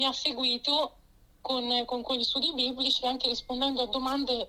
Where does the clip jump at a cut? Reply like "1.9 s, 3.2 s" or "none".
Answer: 2.0 s